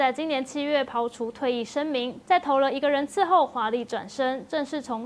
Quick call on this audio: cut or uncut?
cut